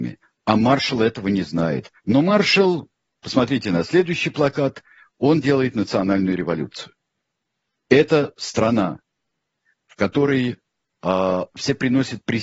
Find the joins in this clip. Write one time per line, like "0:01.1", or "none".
0:02.0